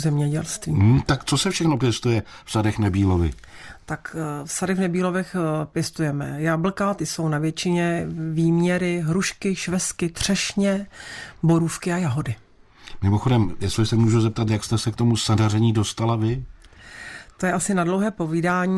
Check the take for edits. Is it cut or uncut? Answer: uncut